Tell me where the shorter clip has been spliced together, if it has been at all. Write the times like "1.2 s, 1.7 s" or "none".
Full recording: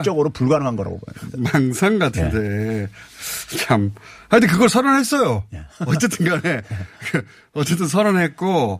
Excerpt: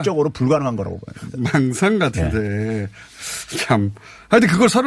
none